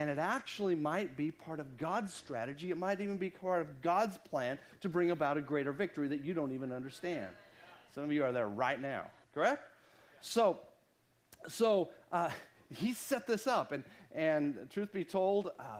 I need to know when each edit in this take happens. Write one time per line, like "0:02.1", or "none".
0:09.2